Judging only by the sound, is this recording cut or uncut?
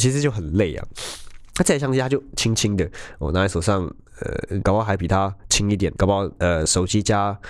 cut